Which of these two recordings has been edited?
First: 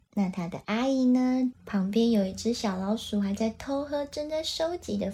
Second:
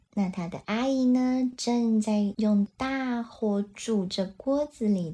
first; 1 cut; at 1.5 s

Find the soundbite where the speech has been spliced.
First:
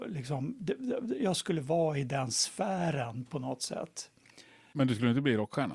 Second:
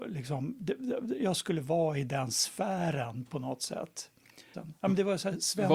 second; 1 cut; at 4.5 s

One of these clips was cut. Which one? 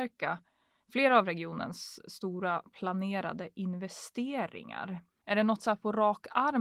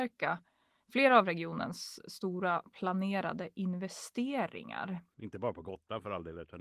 second; 1 cut; at 5.1 s

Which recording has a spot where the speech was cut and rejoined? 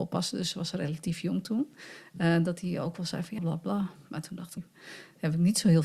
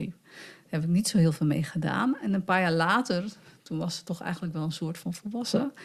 first; 2 cuts; at 3.4 s, 4.6 s

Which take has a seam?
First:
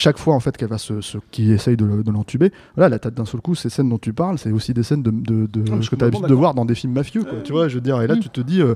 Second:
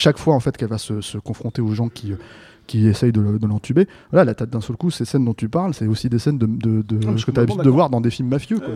first; 1 cut; at 1.2 s

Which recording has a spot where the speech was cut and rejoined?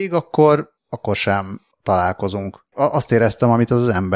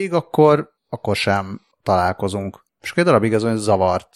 first; 1 cut; at 2.7 s

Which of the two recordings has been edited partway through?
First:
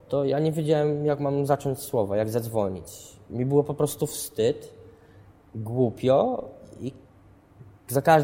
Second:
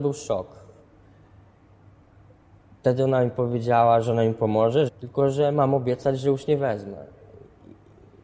second; 1 cut; at 4.9 s

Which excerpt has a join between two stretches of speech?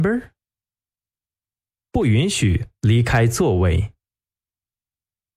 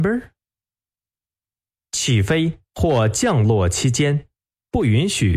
first; 1 cut; at 1.8 s

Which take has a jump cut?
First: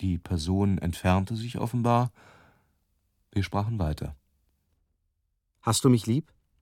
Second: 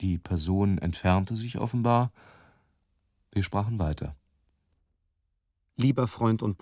first; 1 cut; at 5.5 s

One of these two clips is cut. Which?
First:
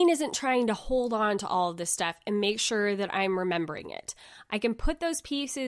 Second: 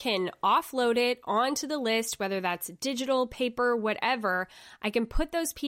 first; 1 cut; at 4.5 s

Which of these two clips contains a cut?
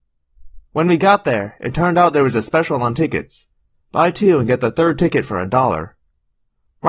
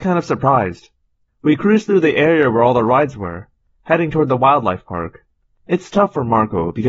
second; 2 cuts; at 1.3 s, 5.5 s

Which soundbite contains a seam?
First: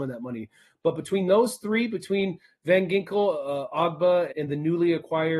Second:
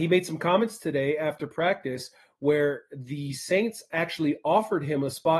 first; 1 cut; at 4.3 s

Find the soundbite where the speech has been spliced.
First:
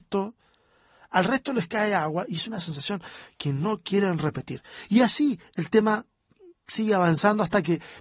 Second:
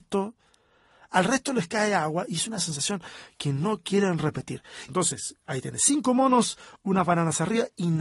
second; 2 cuts; at 4.9 s, 6.8 s

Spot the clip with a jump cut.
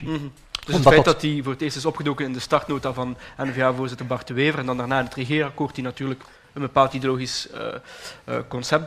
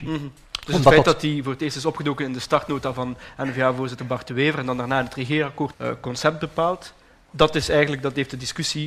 second; 1 cut; at 5.7 s

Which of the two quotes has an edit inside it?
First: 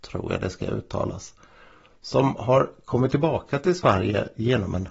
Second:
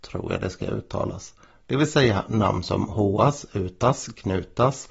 second; 1 cut; at 1.5 s

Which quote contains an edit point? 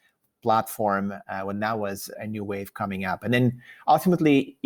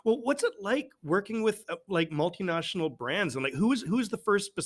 first; 1 cut; at 2.1 s

